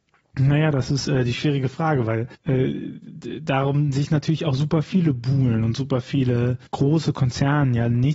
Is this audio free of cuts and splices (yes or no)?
no